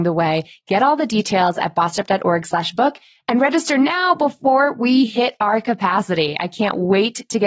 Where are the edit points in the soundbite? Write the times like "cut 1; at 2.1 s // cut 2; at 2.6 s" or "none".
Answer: none